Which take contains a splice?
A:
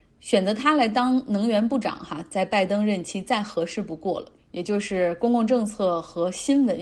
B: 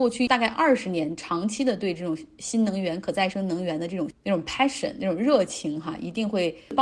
A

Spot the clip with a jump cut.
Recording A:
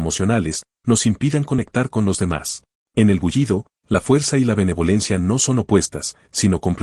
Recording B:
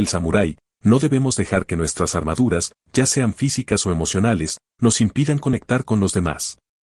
A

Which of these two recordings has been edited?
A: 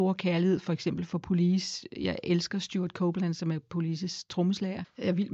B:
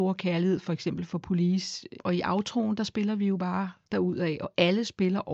B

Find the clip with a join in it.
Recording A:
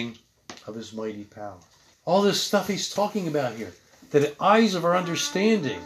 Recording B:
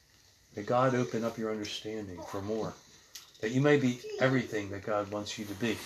A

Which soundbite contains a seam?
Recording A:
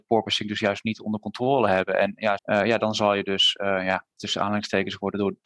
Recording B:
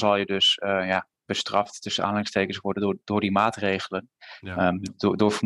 A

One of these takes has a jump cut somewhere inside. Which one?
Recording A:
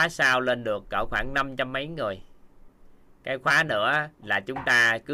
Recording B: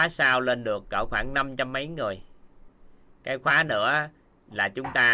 A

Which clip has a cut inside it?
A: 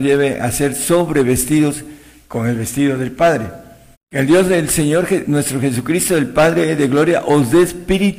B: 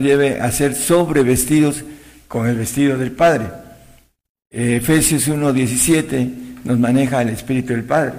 A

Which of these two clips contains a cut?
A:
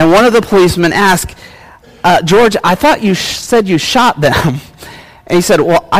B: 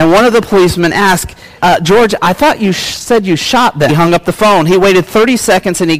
B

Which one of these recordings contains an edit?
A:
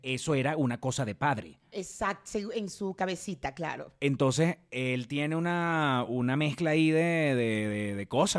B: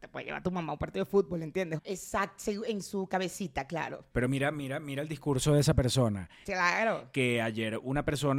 B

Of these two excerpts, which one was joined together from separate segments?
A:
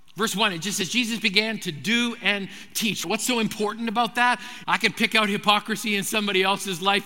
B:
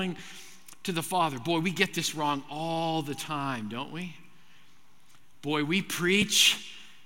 A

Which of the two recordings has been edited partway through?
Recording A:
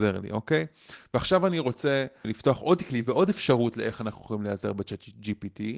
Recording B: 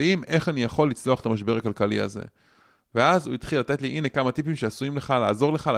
A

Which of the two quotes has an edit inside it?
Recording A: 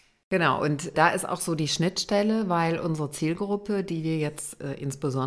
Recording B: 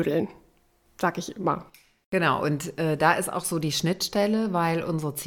A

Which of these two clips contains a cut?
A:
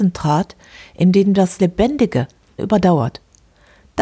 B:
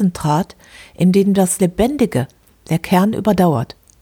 A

